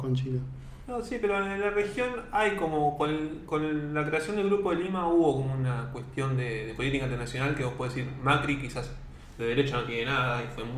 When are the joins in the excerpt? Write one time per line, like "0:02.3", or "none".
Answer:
none